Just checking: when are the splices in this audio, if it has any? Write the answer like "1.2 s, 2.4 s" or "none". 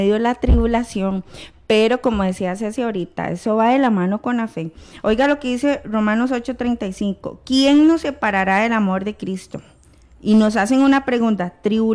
none